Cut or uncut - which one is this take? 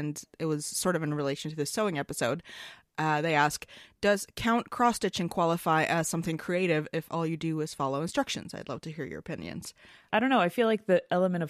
cut